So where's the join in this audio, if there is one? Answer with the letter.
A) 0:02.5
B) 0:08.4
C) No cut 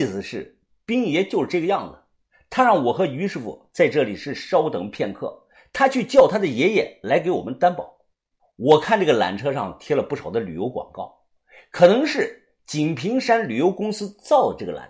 B